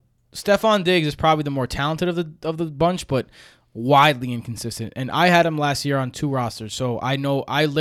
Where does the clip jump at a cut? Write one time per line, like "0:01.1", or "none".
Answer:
none